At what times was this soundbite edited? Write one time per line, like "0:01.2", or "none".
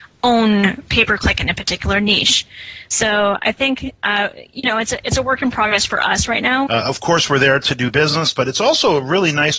0:06.7